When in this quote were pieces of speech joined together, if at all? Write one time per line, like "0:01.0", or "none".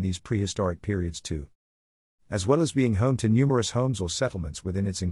none